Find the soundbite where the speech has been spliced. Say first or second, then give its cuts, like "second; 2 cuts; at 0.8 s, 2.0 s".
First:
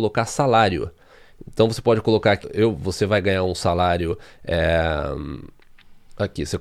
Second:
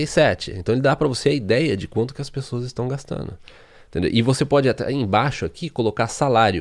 first; 1 cut; at 2.4 s